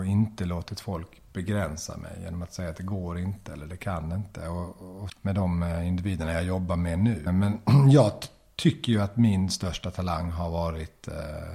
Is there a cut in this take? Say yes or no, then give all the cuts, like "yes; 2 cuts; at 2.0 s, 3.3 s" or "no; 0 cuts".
yes; 2 cuts; at 5.1 s, 7.3 s